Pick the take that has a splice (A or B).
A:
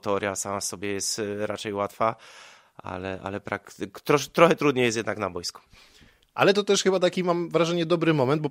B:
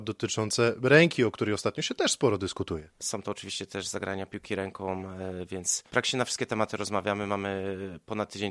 B